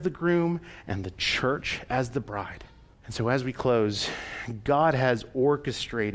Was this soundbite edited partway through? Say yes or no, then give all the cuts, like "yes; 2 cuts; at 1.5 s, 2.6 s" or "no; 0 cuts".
yes; 1 cut; at 2.9 s